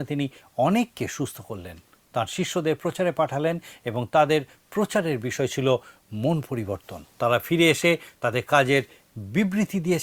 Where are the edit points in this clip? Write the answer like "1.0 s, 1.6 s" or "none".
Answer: 7.1 s